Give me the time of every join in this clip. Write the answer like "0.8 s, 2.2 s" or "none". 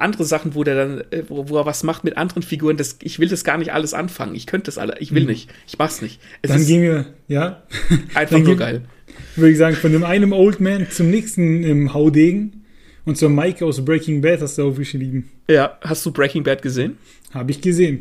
none